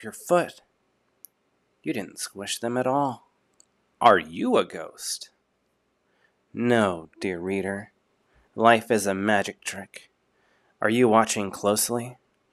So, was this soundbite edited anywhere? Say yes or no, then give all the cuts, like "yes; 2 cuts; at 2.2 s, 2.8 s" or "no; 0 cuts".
yes; 1 cut; at 3.9 s